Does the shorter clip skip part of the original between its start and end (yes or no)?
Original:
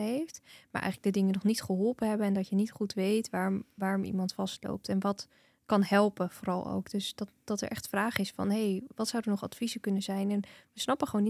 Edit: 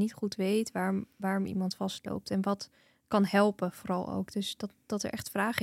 no